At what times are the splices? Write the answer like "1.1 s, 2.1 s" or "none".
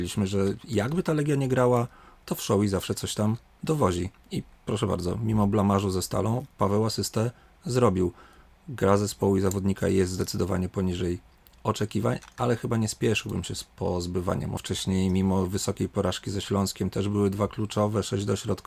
14.6 s